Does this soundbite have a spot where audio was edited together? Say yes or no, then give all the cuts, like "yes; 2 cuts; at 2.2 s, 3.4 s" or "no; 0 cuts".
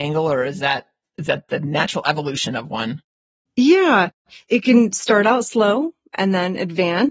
no; 0 cuts